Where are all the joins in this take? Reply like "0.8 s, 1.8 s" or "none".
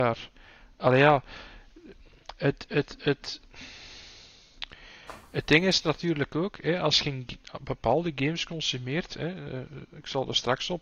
none